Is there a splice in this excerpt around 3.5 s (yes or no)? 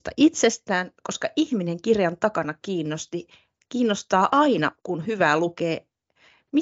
no